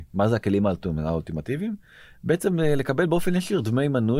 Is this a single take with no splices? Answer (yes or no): yes